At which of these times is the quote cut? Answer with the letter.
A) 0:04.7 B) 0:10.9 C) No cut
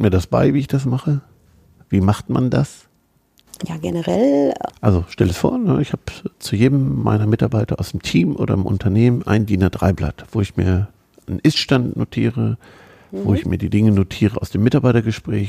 A